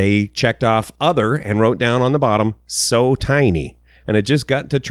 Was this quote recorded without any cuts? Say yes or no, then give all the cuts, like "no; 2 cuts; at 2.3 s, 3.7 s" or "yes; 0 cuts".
no; 1 cut; at 4.0 s